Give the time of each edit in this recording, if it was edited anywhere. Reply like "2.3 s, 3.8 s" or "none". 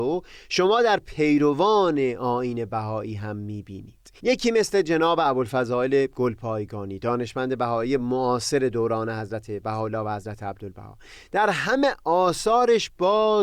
4.2 s